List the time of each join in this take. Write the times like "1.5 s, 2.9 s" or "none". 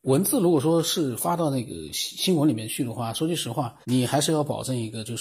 3.8 s